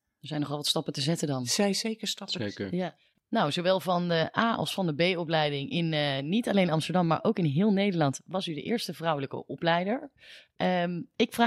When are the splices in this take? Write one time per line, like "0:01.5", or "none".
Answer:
none